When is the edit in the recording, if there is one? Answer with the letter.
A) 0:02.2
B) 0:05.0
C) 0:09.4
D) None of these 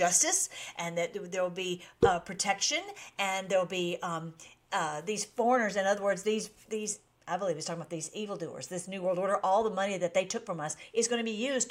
D